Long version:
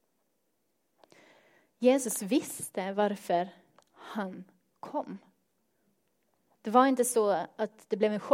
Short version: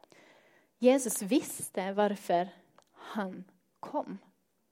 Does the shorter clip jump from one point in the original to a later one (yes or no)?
no